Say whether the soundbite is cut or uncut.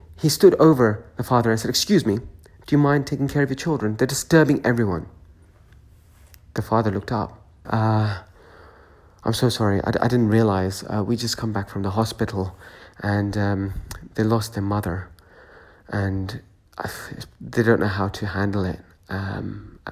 cut